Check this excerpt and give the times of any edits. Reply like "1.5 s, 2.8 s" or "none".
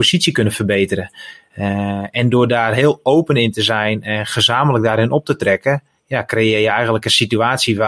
none